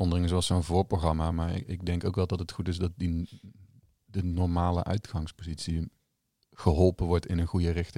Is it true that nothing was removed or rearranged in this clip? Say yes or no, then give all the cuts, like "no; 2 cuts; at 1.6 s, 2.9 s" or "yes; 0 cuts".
yes; 0 cuts